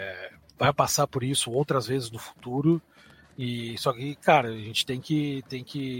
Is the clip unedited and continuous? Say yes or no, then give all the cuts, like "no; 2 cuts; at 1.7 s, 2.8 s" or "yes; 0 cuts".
yes; 0 cuts